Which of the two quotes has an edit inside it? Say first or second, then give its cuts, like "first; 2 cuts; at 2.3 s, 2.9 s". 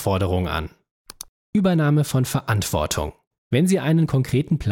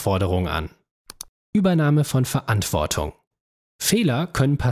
first; 1 cut; at 3.4 s